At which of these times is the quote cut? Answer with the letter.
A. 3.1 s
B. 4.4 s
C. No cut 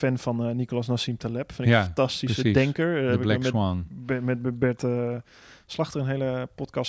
C